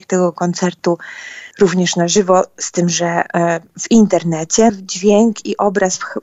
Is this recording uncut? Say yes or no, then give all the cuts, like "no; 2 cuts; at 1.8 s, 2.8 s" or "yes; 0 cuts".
no; 2 cuts; at 1.5 s, 4.7 s